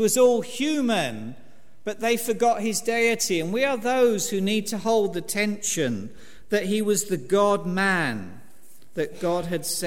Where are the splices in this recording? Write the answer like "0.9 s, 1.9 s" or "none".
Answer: none